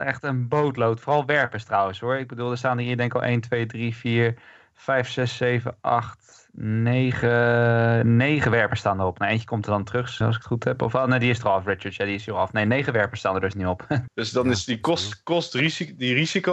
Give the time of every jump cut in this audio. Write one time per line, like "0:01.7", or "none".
0:10.2
0:14.1